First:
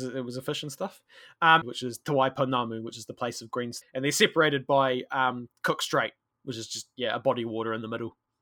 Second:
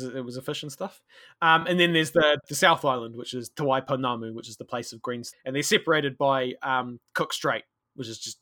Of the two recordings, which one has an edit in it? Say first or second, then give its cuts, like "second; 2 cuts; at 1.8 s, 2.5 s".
first; 1 cut; at 1.6 s